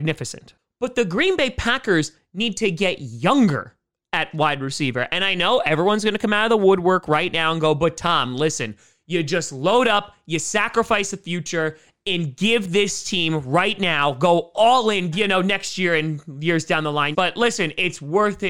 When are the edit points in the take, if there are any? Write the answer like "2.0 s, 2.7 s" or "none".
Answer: 15.1 s, 17.1 s